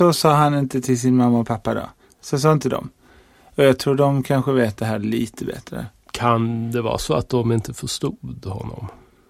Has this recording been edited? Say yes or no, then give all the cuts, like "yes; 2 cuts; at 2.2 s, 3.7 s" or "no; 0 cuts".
no; 0 cuts